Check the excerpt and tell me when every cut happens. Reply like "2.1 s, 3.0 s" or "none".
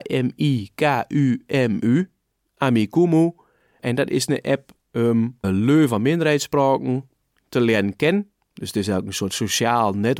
5.4 s